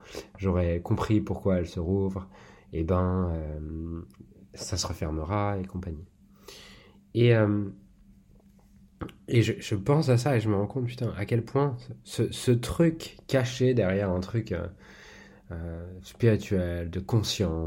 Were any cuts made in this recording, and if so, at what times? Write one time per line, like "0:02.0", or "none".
none

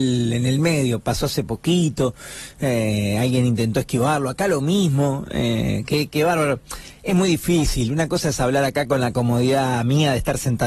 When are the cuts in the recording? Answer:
none

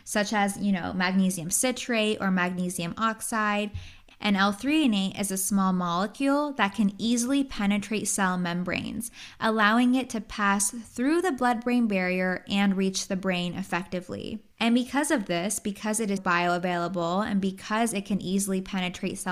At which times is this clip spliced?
0:04.1
0:14.5
0:16.2

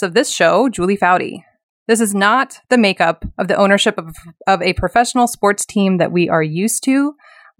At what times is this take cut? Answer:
none

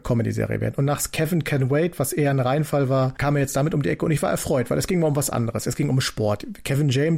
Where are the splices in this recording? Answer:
none

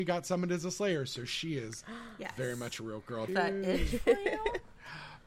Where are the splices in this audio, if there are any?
0:03.3

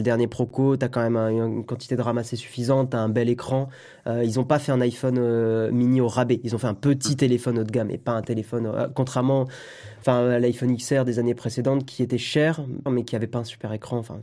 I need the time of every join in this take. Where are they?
0:12.9

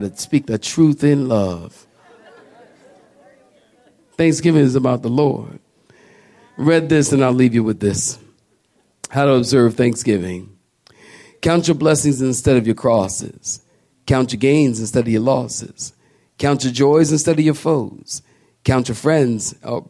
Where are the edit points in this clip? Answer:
none

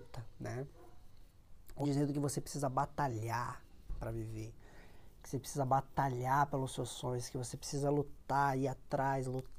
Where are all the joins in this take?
0:01.8

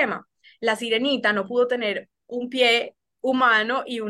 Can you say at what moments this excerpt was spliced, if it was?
none

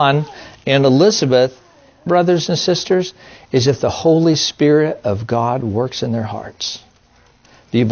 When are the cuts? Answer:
0:02.1

